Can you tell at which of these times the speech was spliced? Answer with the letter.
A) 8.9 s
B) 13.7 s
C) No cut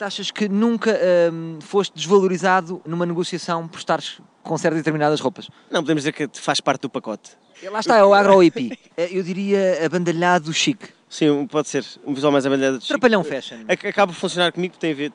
A